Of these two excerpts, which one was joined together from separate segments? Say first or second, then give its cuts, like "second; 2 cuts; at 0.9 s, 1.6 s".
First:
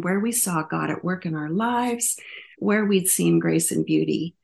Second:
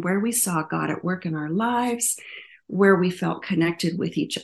first; 1 cut; at 2.5 s